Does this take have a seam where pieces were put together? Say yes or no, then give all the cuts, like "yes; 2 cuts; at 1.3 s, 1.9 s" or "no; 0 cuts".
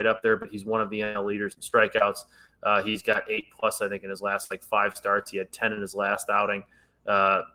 no; 0 cuts